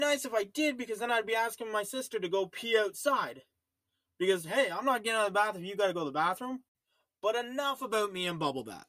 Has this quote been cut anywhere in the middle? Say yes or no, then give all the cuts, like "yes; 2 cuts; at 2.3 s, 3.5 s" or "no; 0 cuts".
no; 0 cuts